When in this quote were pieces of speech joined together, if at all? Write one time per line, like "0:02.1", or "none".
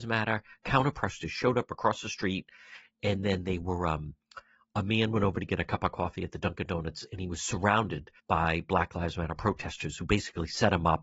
0:08.2